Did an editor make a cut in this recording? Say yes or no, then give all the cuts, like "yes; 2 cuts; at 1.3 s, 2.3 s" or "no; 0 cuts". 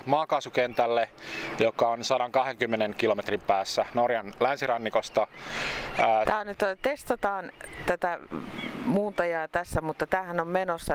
yes; 1 cut; at 6.3 s